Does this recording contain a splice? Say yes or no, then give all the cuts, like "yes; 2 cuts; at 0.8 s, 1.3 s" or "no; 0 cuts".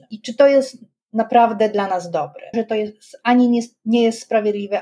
yes; 1 cut; at 2.5 s